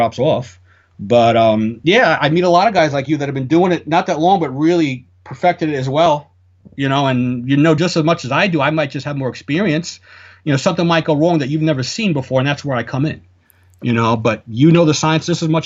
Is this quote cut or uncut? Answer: uncut